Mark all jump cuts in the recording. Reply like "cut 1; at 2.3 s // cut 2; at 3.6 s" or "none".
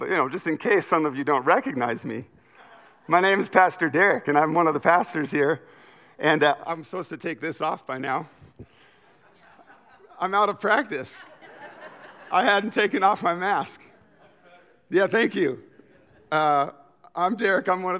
none